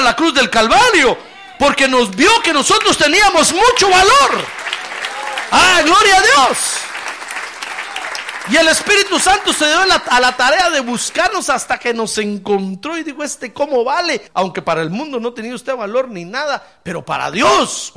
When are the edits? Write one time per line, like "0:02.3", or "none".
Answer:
0:14.3